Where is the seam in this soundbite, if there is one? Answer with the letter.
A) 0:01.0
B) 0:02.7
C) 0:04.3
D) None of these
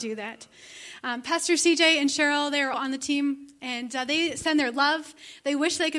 B